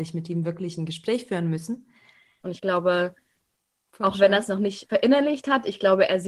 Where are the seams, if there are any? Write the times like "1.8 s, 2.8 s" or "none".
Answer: 2.4 s, 4.9 s